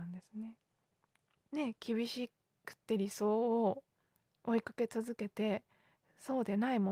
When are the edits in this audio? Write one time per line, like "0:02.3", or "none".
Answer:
0:01.5